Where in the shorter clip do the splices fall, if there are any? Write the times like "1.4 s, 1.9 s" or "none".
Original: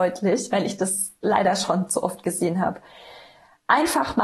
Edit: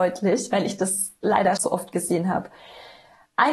1.6 s